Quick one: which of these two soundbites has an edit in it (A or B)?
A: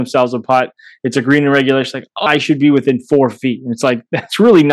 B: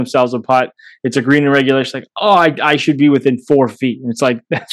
A